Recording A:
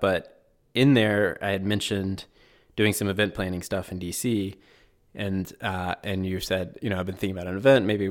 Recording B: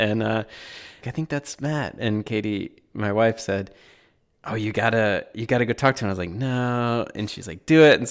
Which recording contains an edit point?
B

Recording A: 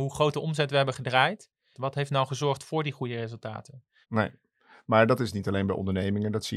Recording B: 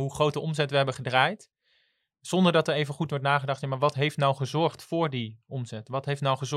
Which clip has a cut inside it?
A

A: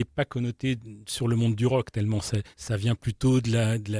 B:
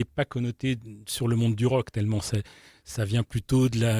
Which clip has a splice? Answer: A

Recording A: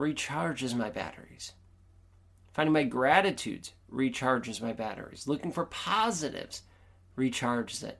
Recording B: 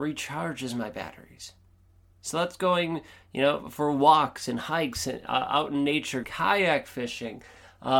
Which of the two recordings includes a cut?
B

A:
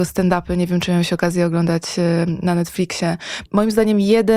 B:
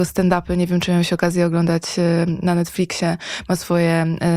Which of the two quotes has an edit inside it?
A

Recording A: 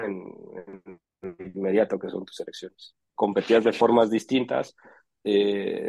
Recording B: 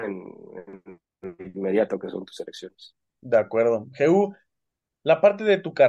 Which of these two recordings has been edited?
A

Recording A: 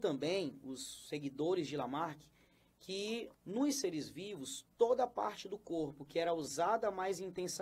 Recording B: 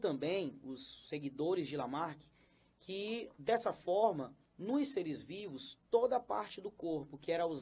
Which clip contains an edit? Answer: A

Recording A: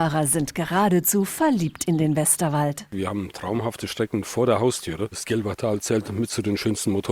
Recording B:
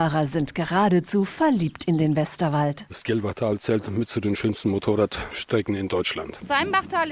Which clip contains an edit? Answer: B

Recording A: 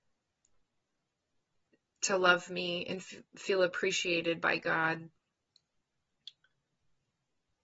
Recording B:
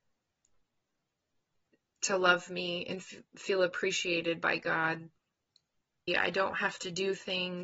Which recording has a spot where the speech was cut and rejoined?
B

